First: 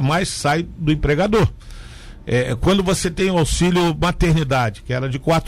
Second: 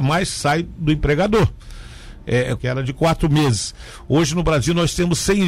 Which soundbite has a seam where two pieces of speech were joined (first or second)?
second